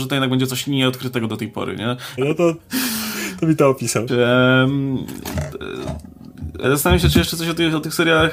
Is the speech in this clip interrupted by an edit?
yes; 3 cuts; at 2.2 s, 4.1 s, 6.6 s

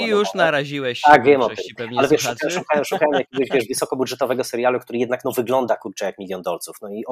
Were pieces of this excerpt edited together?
no; 0 cuts

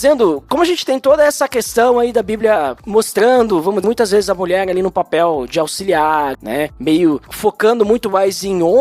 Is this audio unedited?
no; 2 cuts; at 3.8 s, 6.3 s

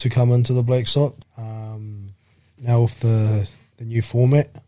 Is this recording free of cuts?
no; 1 cut; at 1.2 s

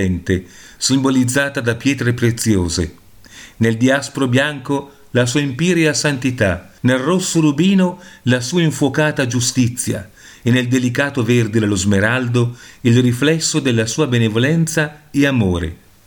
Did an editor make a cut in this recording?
yes; 1 cut; at 6.8 s

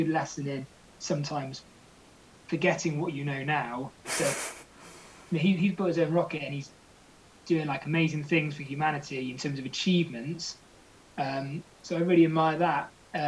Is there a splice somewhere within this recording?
yes; 1 cut; at 4.0 s

